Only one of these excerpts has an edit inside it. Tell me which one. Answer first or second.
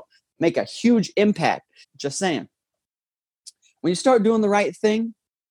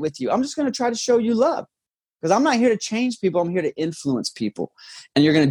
first